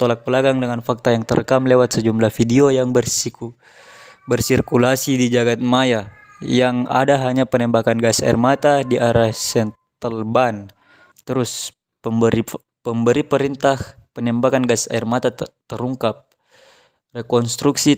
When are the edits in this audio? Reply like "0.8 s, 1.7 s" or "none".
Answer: 11.1 s, 15.6 s